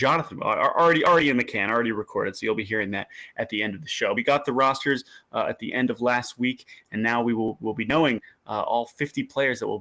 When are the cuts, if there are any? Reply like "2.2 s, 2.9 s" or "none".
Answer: 4.2 s